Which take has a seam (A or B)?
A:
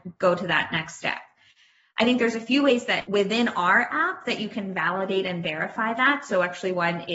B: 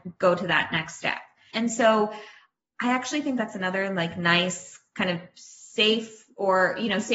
B